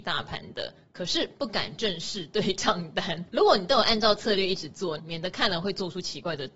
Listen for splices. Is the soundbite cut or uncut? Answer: cut